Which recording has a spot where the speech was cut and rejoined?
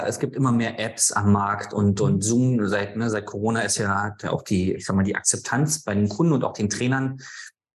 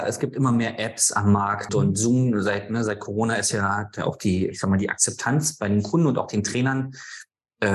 second; 1 cut; at 1.7 s

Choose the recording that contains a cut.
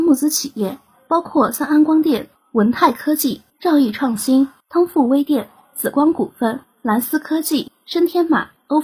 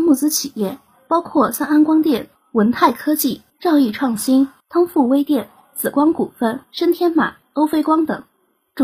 second; 1 cut; at 6.7 s

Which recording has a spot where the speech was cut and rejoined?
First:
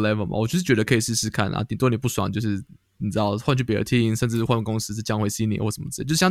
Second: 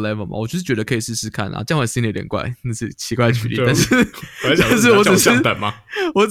second; 1 cut; at 1.7 s

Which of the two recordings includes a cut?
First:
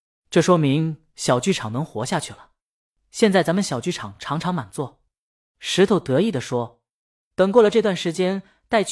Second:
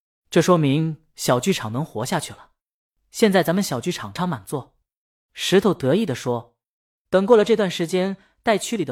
second; 1 cut; at 4.2 s

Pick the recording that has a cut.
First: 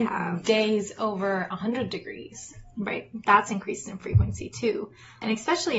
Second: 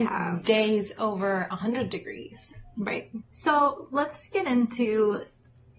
second; 1 cut; at 3.2 s

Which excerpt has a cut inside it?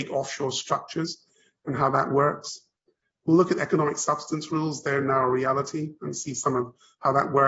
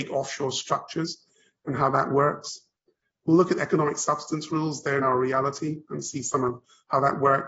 second; 1 cut; at 5.0 s

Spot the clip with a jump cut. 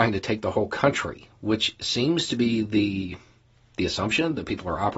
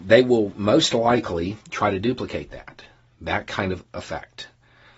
second; 1 cut; at 1.6 s

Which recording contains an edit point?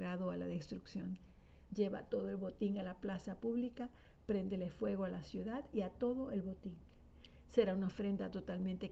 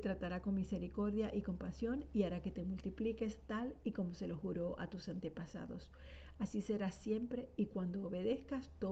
first; 1 cut; at 1.7 s

